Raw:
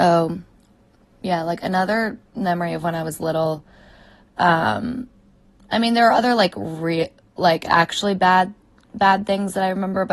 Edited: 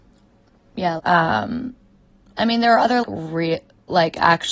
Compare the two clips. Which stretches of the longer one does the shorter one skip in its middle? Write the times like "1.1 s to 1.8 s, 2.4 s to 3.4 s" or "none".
1.4 s to 4.3 s, 6.4 s to 6.5 s